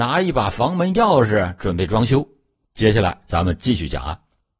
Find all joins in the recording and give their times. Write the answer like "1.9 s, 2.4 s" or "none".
2.6 s